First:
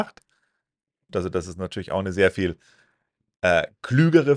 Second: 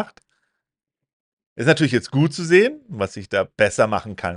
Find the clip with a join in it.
first; 1 cut; at 1.1 s

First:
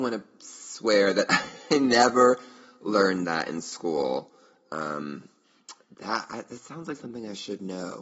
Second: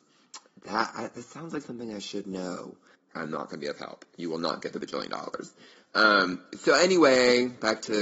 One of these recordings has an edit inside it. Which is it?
second; 1 cut; at 3.1 s

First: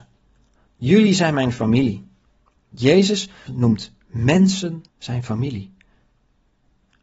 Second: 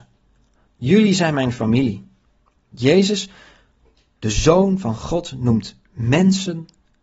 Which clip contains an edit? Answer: first; 2 cuts; at 3.5 s, 4.9 s

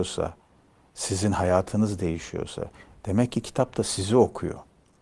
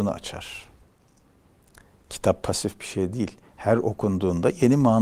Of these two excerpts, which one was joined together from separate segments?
first; 1 cut; at 2.9 s

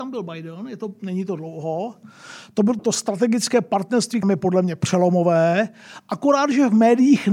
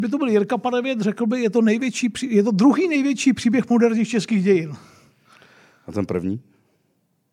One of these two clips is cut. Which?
first; 2 cuts; at 2.8 s, 4.2 s

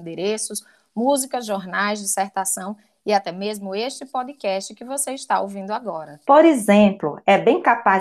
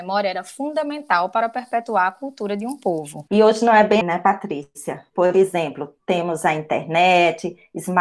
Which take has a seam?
second; 1 cut; at 4.0 s

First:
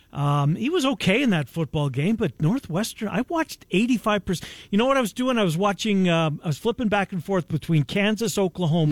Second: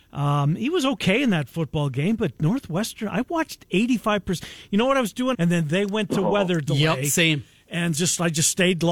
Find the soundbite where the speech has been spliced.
second; 2 cuts; at 5.3 s, 7.9 s

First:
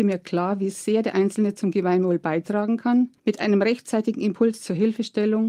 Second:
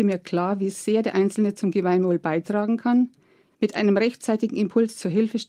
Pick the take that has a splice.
first; 1 cut; at 3.2 s

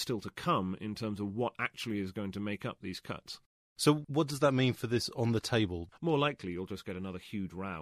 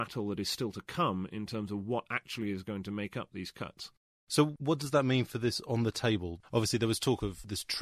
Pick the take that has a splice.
first; 1 cut; at 6.0 s

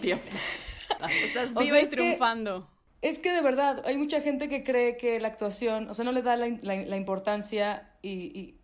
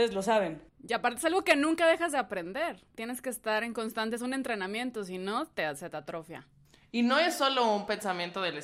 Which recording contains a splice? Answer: first; 1 cut; at 1.0 s

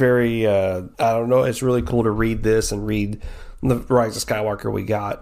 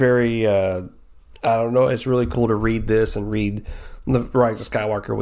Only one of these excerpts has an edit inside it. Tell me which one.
first; 1 cut; at 0.9 s

